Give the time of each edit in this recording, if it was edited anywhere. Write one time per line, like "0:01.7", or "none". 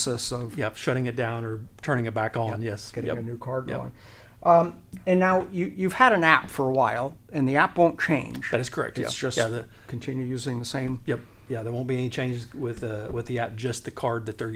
none